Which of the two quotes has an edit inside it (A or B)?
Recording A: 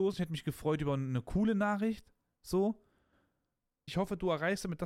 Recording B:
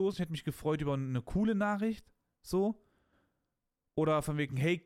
A